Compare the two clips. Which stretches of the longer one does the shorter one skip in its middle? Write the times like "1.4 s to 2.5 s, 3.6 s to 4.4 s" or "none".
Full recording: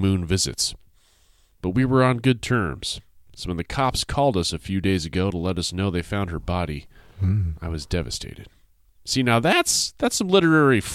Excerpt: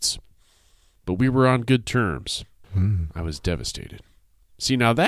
3.2 s to 7.1 s